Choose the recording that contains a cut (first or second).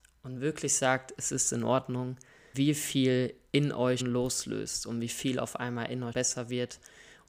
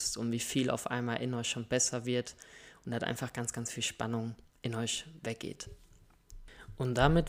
first